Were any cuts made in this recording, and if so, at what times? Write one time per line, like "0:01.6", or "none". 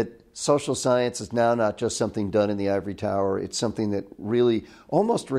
none